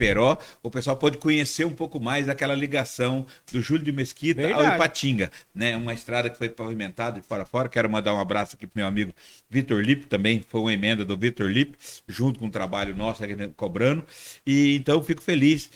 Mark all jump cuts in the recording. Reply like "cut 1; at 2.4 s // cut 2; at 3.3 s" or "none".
none